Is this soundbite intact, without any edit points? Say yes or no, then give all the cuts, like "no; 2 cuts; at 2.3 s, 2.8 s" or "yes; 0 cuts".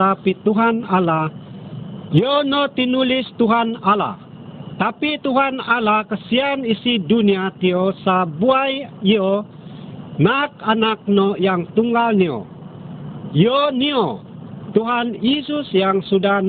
no; 1 cut; at 2.1 s